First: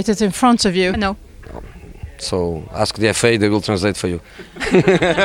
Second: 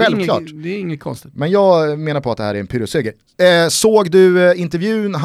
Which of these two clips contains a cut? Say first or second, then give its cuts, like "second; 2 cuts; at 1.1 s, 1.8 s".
first; 1 cut; at 0.9 s